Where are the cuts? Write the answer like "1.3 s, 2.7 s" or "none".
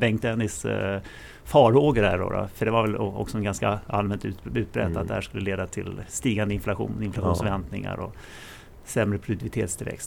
none